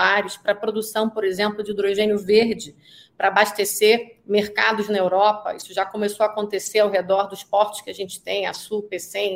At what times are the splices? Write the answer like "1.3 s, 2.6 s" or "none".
none